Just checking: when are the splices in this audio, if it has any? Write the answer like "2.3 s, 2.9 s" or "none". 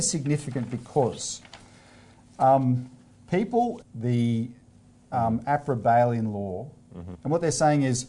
3.8 s, 7.1 s